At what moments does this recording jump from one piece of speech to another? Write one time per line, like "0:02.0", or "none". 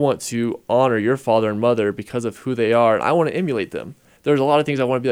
0:04.2